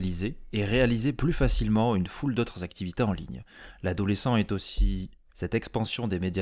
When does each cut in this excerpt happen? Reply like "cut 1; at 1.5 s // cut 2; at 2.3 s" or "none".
cut 1; at 5.3 s